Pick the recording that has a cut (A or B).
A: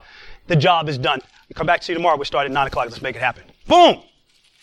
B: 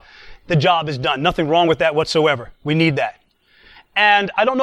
A